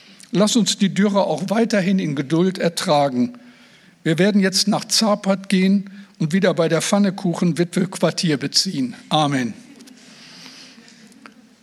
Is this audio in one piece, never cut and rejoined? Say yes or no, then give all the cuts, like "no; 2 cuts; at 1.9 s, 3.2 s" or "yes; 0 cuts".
yes; 0 cuts